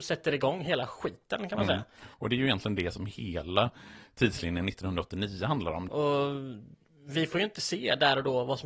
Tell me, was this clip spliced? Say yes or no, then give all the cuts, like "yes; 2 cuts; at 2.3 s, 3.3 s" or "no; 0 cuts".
yes; 1 cut; at 5.9 s